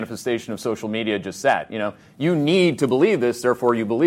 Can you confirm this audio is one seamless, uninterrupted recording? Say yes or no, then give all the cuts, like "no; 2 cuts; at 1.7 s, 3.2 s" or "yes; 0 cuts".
yes; 0 cuts